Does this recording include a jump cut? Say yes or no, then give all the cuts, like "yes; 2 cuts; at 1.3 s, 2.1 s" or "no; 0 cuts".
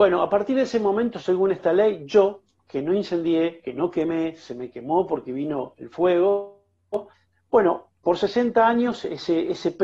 no; 0 cuts